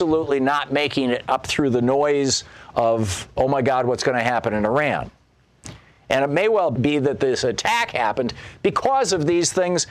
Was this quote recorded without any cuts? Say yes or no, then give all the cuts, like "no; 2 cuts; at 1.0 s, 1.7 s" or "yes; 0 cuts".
yes; 0 cuts